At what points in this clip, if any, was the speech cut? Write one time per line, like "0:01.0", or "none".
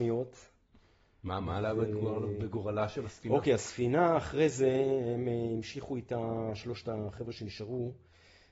none